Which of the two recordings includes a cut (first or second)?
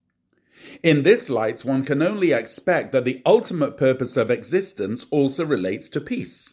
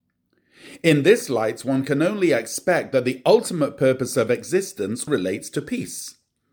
second